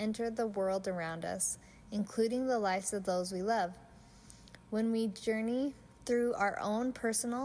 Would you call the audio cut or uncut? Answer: uncut